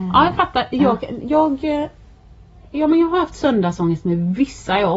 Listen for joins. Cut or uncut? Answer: cut